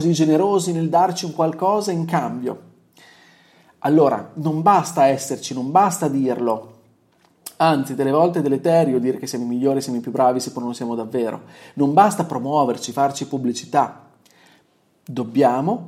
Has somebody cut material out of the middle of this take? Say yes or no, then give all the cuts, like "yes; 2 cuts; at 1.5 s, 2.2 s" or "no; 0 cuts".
no; 0 cuts